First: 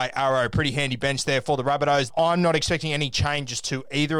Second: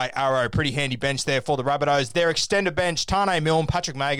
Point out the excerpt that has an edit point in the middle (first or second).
first